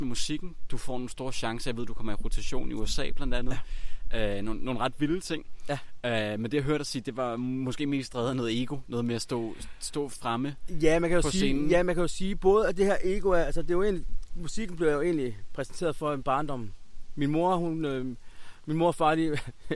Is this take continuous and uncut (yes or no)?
yes